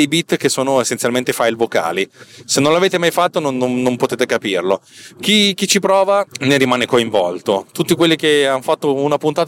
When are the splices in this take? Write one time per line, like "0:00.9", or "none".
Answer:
0:02.4